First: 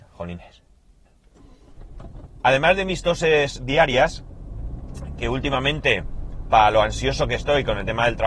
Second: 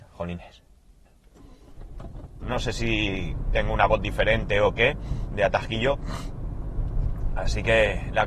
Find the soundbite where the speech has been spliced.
second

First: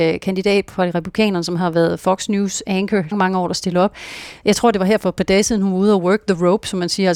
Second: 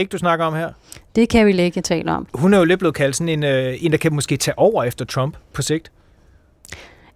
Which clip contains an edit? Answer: first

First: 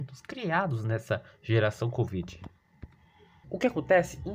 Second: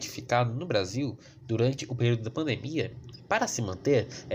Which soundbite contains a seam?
first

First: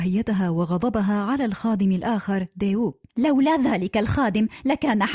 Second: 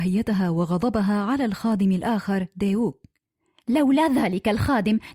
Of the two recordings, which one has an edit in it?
first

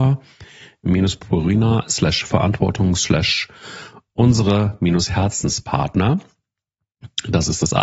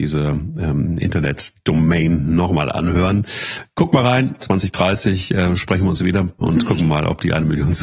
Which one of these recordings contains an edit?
second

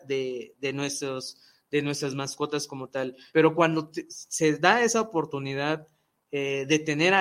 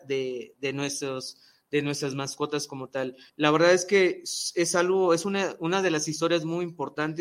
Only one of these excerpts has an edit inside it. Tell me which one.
first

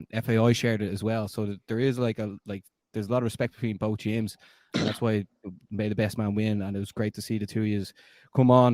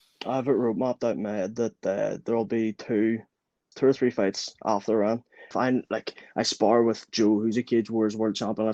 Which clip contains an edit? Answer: second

